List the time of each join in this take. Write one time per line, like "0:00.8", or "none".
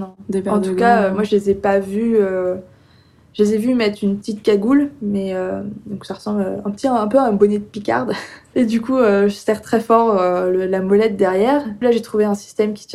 0:08.5
0:11.8